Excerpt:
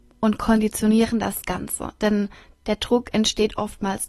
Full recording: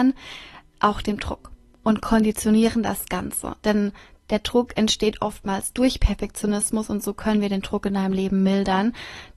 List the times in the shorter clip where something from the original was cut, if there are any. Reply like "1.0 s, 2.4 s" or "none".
none